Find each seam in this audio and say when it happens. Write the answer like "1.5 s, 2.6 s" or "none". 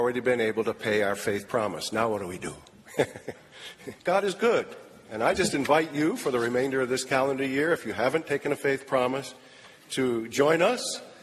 4.0 s